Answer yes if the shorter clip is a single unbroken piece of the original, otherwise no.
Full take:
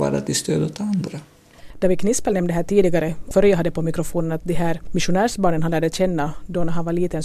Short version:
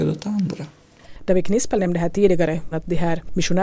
no